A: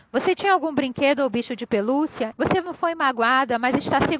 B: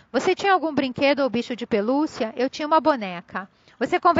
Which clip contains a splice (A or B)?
A